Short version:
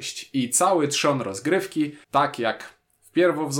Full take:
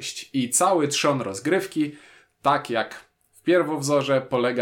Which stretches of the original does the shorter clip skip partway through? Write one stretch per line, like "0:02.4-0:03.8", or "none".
0:02.0-0:02.3